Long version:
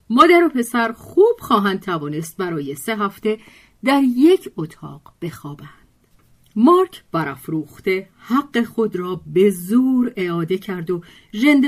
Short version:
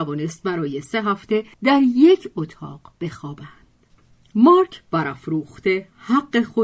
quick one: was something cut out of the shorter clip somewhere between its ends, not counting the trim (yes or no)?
yes